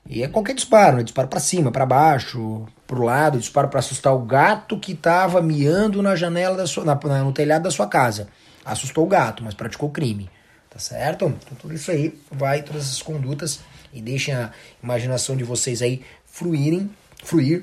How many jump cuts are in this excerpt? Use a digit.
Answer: 0